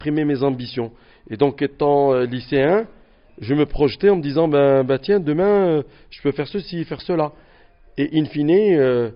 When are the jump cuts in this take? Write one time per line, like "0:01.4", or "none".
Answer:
0:03.3